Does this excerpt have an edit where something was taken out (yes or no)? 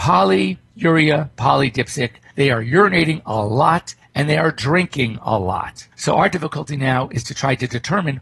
yes